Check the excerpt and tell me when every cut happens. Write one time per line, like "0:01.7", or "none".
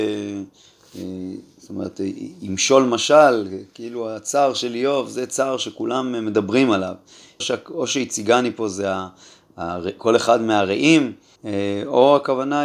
0:07.4
0:11.4